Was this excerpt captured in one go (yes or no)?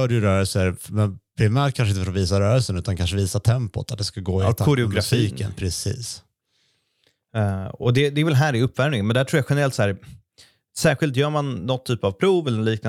yes